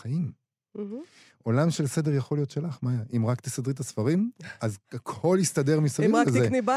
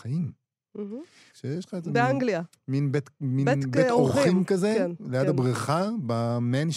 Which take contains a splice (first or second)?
second